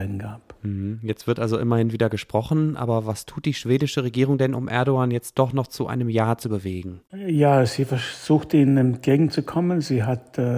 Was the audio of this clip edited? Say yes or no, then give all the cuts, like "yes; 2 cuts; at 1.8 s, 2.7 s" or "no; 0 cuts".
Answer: no; 0 cuts